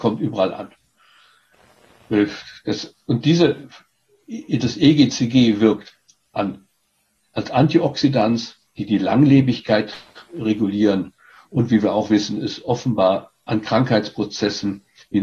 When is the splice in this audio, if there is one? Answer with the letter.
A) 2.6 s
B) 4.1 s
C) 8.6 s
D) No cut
C